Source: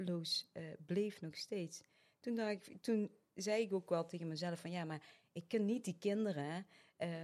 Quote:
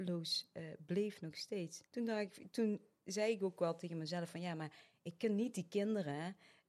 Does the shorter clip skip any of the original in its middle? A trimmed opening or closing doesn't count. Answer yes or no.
yes